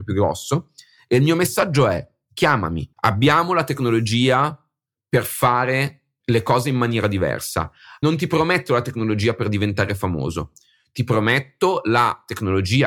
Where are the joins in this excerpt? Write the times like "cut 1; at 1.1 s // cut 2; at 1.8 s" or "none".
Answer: cut 1; at 2.9 s